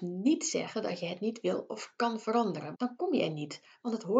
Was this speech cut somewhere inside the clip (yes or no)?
yes